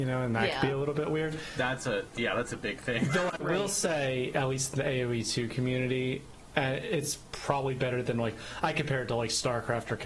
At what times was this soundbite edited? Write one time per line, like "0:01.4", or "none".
none